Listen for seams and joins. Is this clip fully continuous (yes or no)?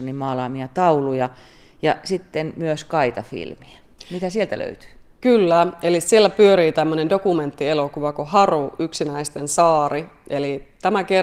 yes